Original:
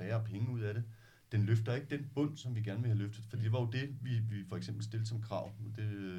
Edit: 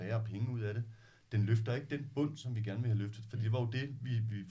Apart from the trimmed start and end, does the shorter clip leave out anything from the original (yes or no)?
no